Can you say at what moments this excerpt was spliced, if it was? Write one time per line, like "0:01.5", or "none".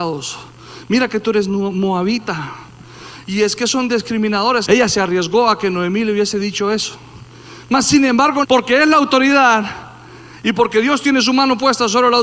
0:04.6
0:08.4